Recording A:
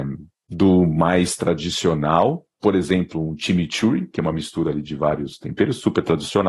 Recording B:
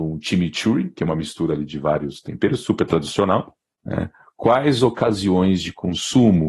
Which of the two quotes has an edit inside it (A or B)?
B